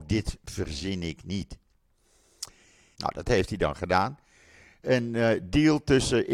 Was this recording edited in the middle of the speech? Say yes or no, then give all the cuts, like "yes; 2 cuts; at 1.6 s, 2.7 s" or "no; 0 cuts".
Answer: yes; 1 cut; at 2.9 s